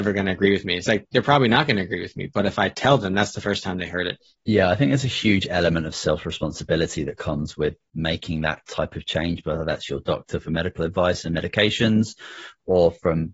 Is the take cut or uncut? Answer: cut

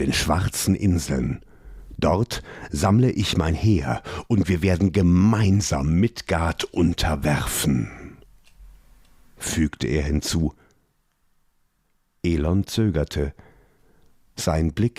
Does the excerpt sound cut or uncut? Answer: uncut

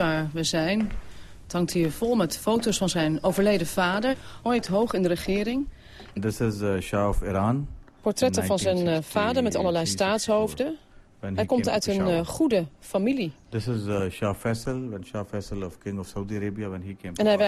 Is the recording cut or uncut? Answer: cut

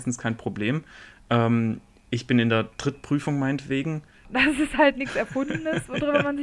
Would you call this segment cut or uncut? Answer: cut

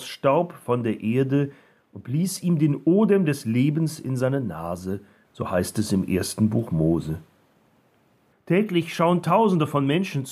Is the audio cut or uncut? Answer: cut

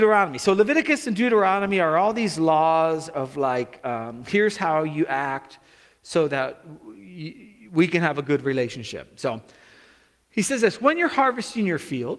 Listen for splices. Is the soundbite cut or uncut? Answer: uncut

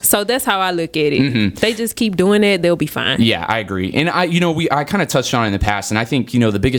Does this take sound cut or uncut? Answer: uncut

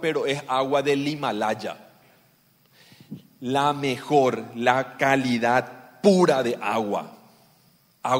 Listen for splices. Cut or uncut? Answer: uncut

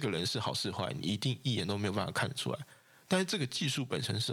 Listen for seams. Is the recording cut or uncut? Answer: uncut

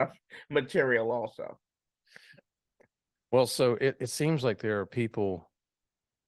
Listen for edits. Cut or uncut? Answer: uncut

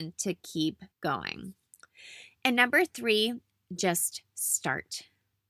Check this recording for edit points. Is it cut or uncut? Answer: cut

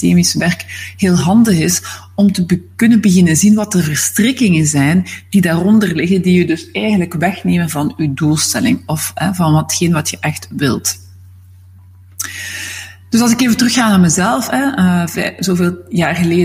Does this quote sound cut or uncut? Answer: uncut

